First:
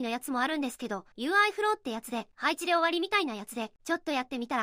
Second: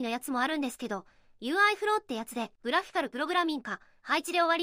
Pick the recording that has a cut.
first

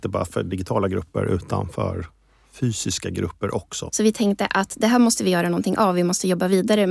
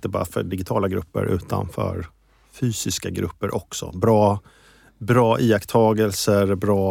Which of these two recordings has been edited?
first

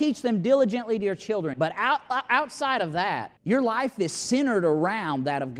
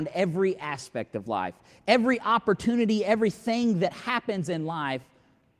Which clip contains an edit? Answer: first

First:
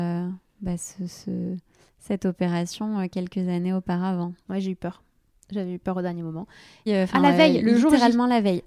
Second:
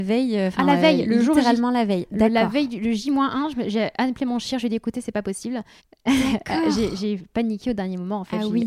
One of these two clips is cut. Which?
first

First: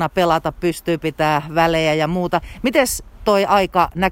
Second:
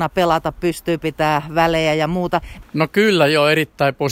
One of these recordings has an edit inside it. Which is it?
second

